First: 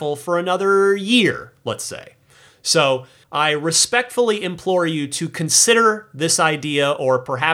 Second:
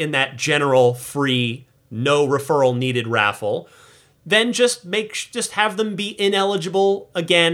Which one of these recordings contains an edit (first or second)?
first